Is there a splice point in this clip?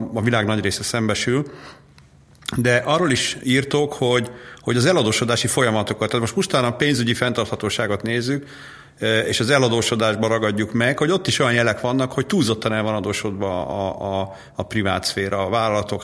no; 0 cuts

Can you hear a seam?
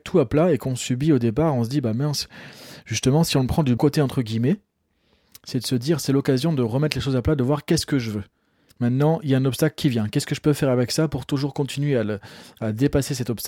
yes; 2 cuts; at 3.8 s, 8.7 s

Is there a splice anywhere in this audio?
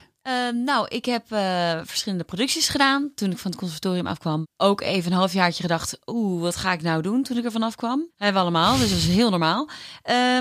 yes; 1 cut; at 8.1 s

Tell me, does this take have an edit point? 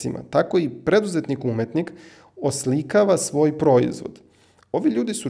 no; 0 cuts

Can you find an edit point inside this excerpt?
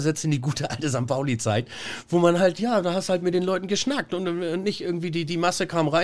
no; 0 cuts

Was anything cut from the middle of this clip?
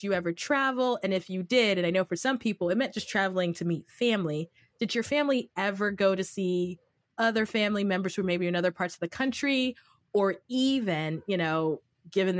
no; 0 cuts

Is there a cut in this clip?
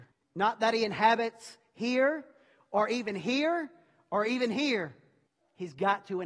no; 0 cuts

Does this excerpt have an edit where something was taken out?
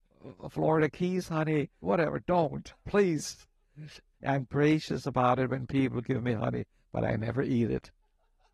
yes; 2 cuts; at 1.8 s, 4.1 s

